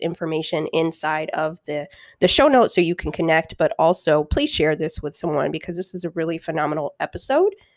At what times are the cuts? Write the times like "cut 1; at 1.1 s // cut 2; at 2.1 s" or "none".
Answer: none